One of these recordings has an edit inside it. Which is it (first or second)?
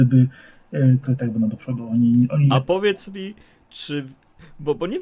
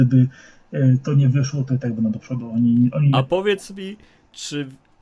first